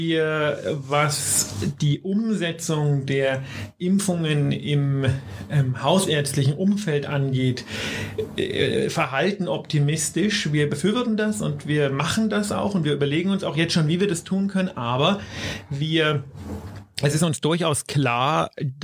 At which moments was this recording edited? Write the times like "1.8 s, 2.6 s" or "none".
none